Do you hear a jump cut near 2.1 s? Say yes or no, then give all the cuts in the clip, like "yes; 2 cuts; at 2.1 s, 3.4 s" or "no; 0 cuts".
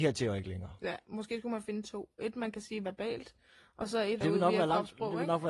no; 1 cut; at 4.2 s